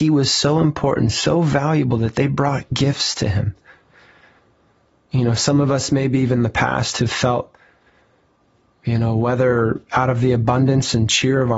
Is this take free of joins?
yes; 0 cuts

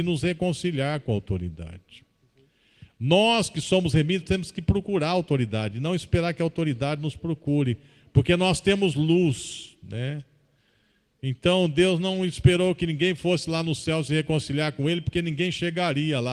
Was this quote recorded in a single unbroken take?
yes; 0 cuts

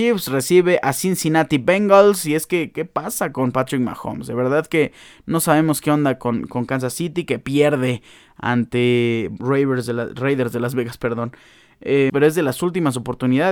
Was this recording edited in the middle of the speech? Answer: yes; 2 cuts; at 9.4 s, 12.1 s

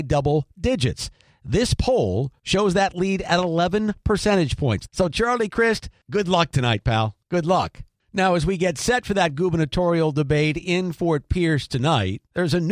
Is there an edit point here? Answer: yes; 1 cut; at 4.9 s

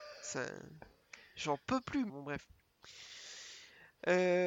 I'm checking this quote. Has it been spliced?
yes; 1 cut; at 2.1 s

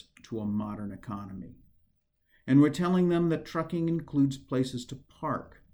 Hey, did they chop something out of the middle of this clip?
no; 0 cuts

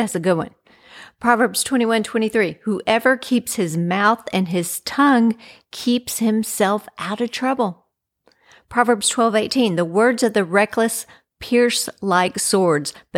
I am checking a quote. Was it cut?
no; 0 cuts

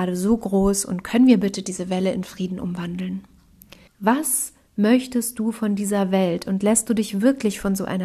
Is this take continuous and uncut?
no; 1 cut; at 3.9 s

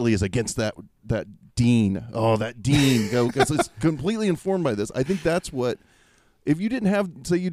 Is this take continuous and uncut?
yes; 0 cuts

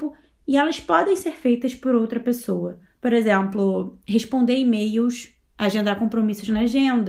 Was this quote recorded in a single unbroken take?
yes; 0 cuts

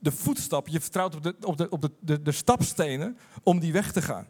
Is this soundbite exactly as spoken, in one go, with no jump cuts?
yes; 0 cuts

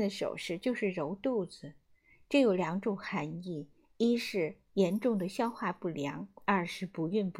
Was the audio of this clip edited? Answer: no; 0 cuts

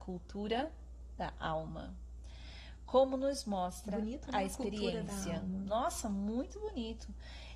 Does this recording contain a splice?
no; 0 cuts

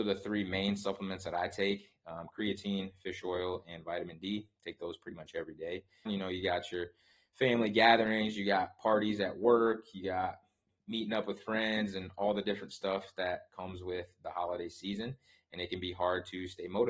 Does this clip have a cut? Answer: yes; 1 cut; at 6.1 s

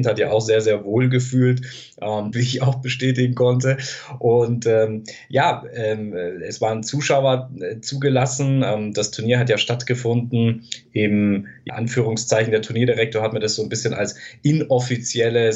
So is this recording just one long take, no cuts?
no; 2 cuts; at 2.3 s, 11.7 s

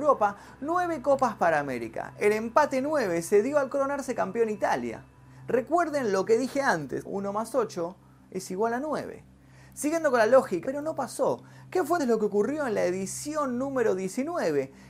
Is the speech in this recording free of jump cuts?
no; 3 cuts; at 7.1 s, 10.6 s, 12.0 s

